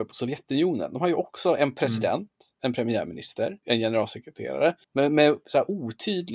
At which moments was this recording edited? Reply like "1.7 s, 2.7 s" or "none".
3.6 s, 4.8 s